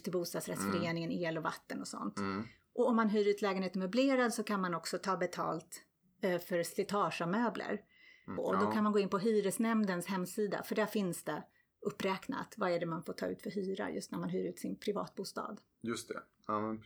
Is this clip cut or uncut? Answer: cut